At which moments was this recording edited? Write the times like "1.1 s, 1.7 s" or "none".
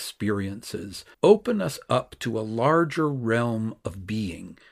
1.1 s

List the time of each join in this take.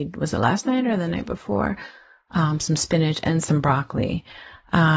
none

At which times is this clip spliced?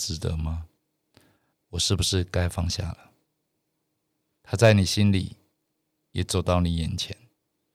1.5 s, 4.4 s

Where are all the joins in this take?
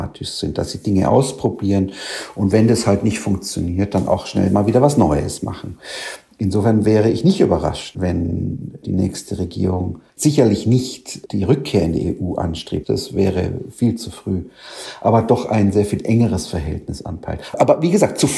10.1 s

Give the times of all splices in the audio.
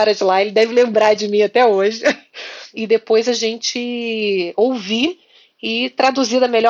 2.7 s

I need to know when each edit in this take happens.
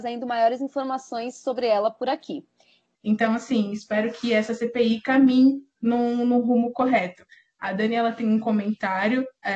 2.9 s

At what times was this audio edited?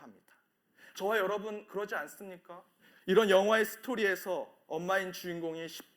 0.9 s, 2.9 s

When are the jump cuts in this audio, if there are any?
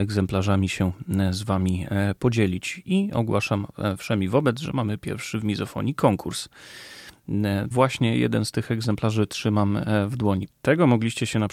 7.7 s, 10.5 s

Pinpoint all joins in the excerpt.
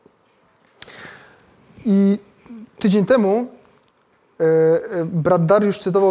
none

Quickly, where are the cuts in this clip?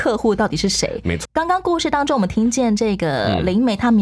1.2 s

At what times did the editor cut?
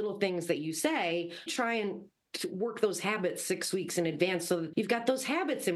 1.5 s, 4.7 s

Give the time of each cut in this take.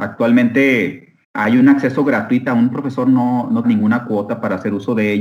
1.2 s, 2.5 s, 3.6 s

